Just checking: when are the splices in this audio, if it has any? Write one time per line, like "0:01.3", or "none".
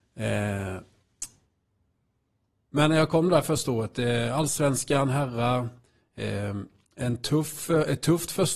none